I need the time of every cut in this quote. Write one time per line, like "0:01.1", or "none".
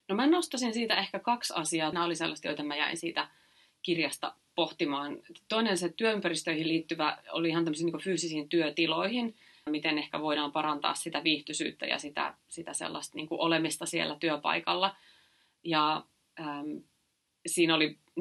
0:01.9
0:09.7